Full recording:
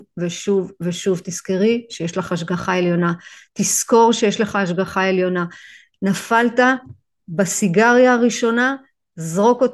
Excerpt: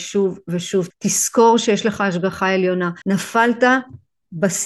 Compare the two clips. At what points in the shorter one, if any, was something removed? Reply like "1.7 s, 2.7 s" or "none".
0.9 s, 3.0 s